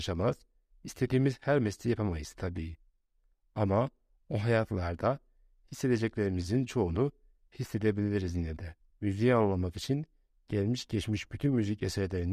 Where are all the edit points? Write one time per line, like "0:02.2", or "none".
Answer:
0:08.9